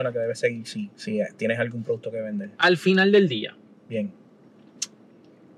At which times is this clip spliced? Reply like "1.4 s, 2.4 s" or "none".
0.9 s, 2.5 s